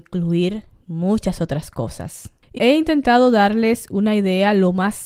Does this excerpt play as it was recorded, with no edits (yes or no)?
no